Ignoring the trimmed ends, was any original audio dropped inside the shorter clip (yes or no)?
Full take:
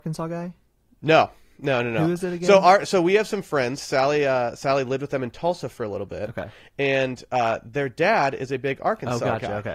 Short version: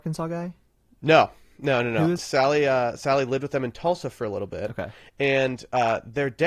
yes